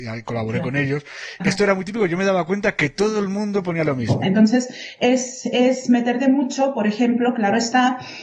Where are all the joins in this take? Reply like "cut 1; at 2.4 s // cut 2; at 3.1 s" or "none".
cut 1; at 1.4 s // cut 2; at 4.2 s